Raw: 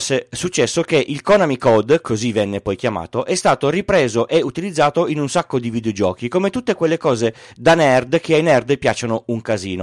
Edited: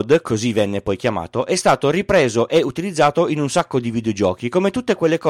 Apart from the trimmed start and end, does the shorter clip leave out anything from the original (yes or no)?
no